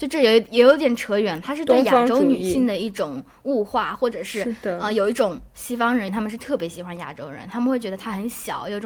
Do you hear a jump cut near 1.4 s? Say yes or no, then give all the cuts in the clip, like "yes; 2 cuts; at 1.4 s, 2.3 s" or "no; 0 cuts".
no; 1 cut; at 6.1 s